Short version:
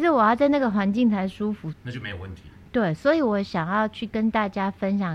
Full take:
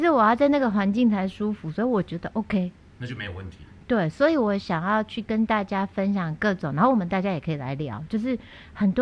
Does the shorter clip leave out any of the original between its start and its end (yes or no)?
yes